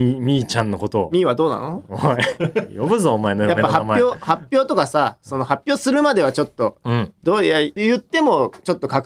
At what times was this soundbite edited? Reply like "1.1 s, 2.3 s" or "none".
7.8 s